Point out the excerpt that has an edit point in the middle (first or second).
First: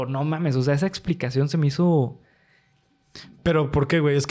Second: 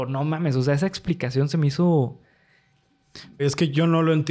second